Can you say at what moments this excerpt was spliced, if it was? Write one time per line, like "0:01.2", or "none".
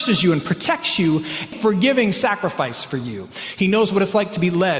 0:01.5

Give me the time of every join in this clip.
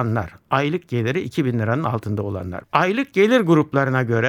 0:02.6

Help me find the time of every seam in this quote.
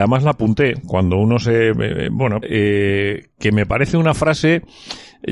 0:02.4

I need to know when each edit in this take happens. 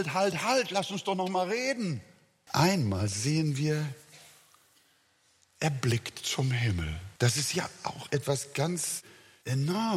0:02.5
0:07.2

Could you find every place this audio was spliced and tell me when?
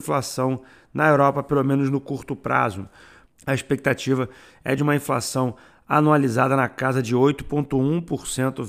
0:03.3

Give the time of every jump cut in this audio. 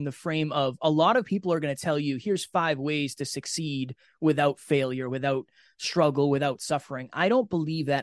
none

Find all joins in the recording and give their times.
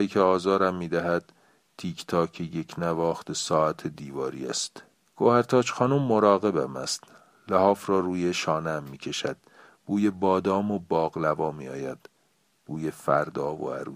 none

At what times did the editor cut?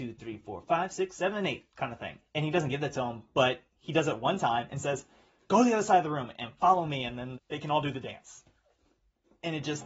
0:02.3
0:07.3

